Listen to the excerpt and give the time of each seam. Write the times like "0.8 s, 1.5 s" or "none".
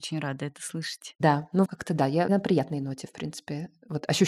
1.7 s